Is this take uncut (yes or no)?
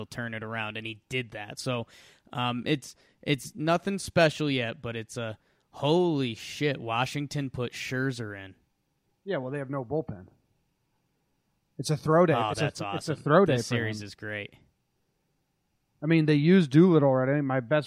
yes